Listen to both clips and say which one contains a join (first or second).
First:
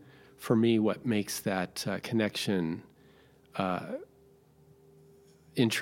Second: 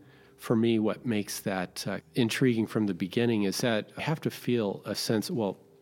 second